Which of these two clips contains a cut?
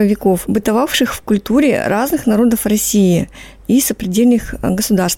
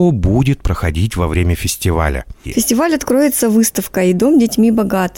second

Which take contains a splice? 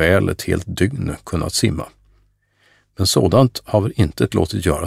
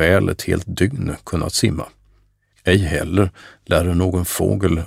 second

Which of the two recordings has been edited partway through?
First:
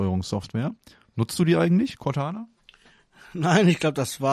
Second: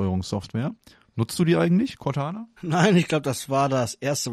second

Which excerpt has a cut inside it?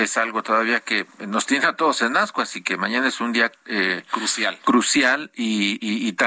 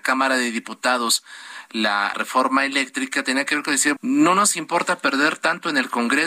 second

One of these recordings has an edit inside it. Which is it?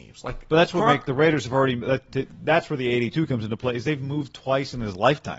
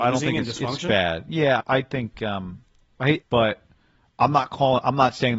second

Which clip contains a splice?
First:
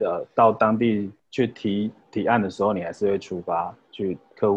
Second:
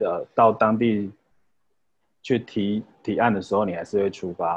first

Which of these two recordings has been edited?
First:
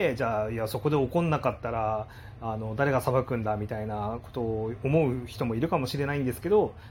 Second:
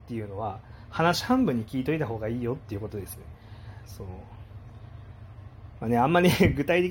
second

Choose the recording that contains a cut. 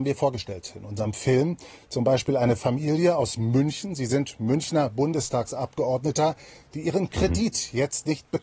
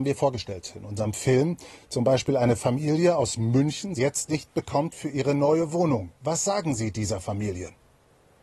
second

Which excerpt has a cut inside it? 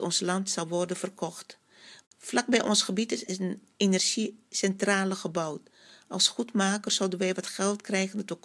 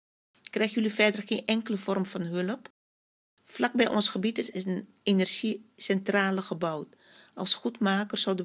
first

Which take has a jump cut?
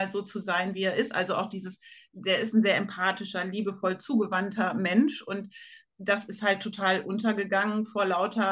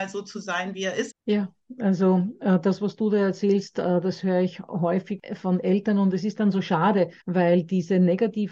second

